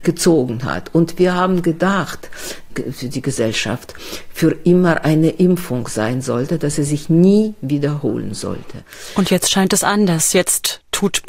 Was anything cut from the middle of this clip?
yes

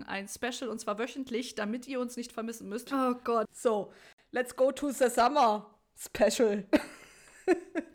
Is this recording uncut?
no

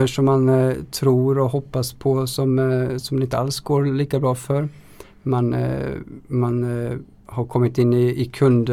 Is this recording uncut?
yes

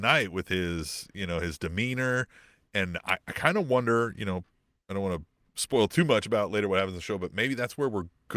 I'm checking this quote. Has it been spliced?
no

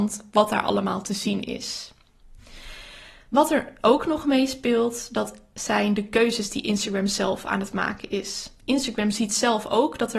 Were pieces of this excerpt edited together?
no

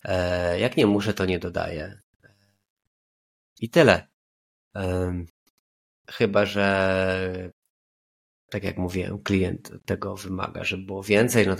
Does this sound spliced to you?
no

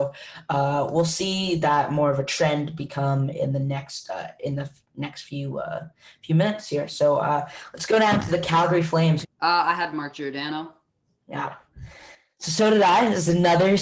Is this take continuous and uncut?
no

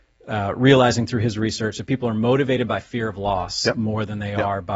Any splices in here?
no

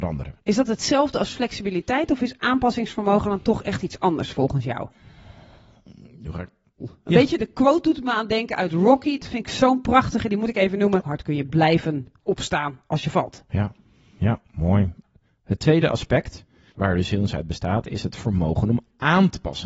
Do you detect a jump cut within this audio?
yes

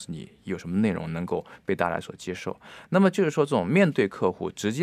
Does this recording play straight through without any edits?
yes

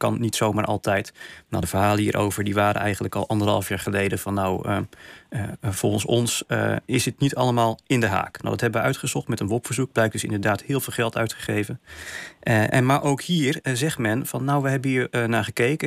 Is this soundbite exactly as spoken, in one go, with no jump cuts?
yes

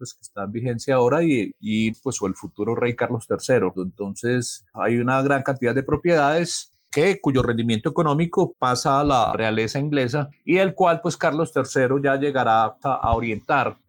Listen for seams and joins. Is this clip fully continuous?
no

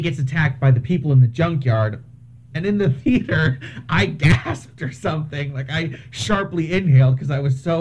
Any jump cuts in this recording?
yes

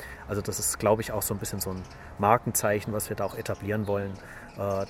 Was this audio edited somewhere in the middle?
no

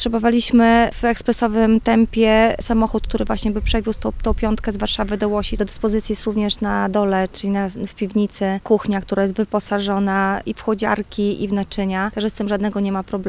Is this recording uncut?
no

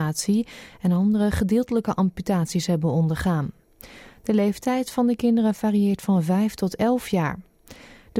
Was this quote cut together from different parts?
no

